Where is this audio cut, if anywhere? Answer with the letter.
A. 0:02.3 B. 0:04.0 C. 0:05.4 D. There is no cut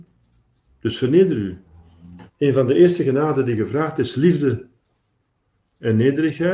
A